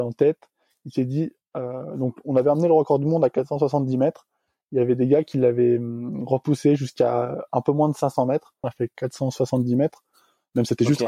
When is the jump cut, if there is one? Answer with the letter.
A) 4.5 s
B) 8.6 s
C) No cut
B